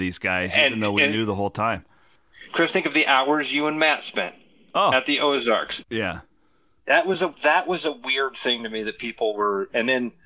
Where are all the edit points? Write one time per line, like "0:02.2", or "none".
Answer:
0:05.8